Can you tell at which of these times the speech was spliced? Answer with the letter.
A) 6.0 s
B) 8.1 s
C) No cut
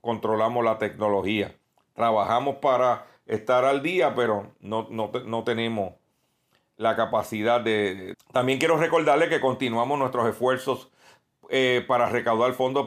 B